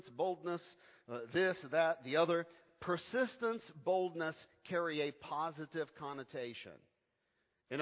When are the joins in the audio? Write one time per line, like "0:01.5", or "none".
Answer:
none